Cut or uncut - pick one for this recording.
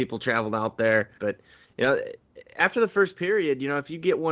cut